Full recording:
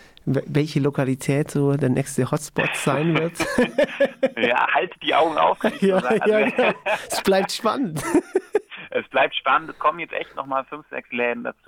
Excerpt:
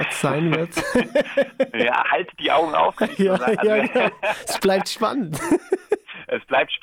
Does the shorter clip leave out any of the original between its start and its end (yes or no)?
no